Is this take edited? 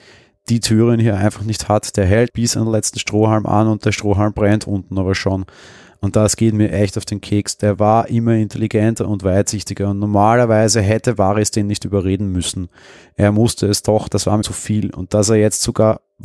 yes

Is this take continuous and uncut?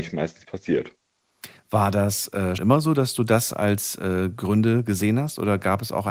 no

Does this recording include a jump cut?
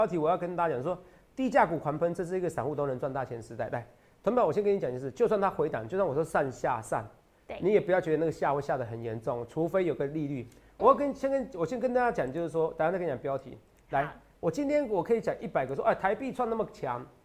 no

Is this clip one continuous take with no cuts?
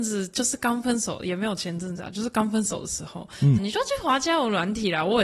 no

